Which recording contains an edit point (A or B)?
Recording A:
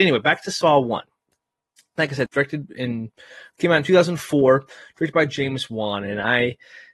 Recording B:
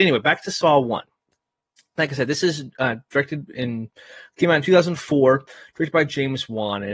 A